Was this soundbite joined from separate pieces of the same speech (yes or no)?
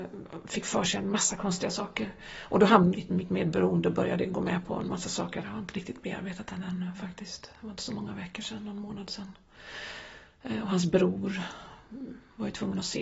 yes